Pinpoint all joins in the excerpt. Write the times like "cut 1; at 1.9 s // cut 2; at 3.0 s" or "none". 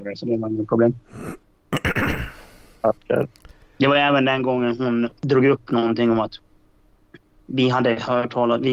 cut 1; at 5.2 s